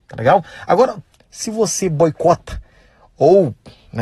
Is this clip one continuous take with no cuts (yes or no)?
no